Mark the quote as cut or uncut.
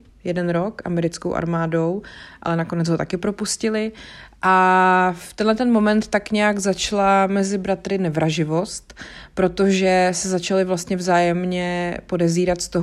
uncut